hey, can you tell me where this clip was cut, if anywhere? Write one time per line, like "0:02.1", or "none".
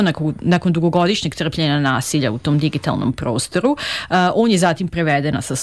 none